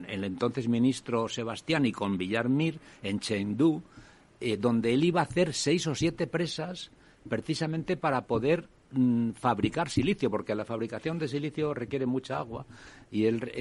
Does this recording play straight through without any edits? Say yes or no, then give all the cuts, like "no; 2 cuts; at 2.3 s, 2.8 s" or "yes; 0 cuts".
yes; 0 cuts